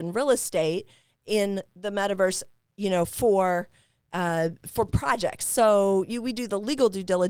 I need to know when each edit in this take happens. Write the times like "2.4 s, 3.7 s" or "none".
none